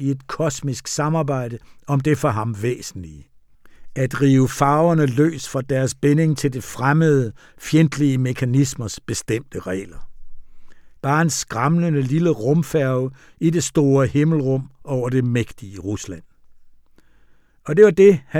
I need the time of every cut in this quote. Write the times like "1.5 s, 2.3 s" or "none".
11.0 s